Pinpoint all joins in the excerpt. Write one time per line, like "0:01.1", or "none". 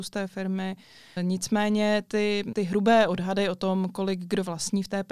0:01.2
0:02.5